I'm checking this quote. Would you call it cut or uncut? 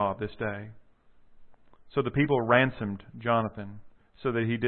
uncut